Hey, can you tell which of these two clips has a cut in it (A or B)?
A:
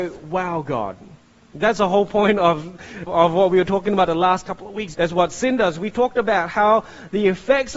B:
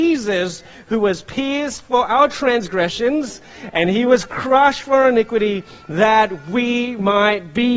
A